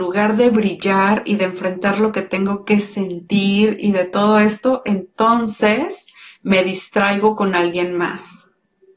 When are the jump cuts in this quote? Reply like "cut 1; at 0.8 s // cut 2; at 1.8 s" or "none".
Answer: none